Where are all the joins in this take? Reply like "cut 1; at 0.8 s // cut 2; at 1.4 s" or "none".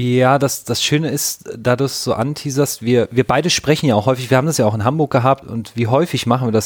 cut 1; at 5.4 s